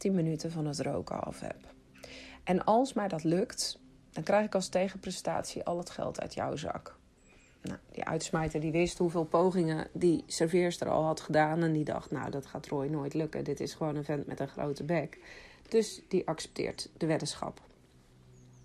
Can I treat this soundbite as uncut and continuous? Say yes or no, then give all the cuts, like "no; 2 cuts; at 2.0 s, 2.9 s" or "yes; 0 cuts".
yes; 0 cuts